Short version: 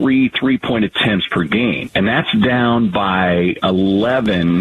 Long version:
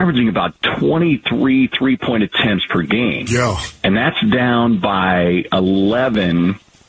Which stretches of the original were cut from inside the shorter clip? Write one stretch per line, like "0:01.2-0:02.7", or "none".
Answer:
0:03.3-0:03.8